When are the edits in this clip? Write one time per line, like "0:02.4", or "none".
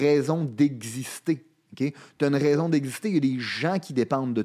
none